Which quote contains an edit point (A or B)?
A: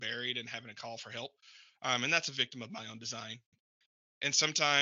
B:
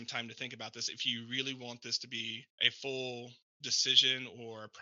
B